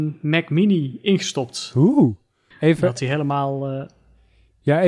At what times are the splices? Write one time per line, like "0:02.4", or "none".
0:02.5